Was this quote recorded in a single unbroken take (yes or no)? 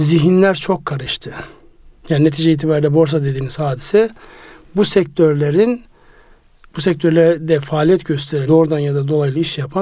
no